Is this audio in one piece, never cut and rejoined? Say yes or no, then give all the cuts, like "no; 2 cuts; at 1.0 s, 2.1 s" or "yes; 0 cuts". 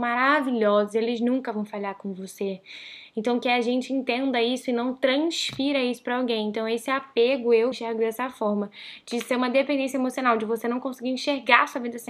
no; 1 cut; at 7.7 s